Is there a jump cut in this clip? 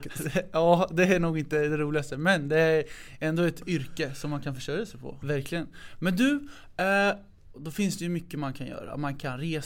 yes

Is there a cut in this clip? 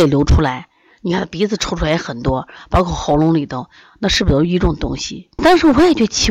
yes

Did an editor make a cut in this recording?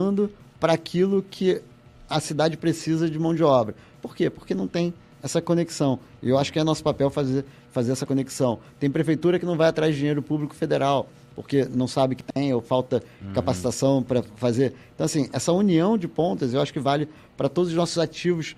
no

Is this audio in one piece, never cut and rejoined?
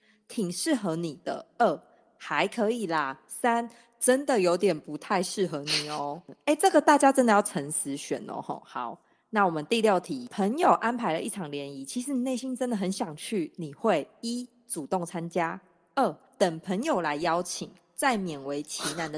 yes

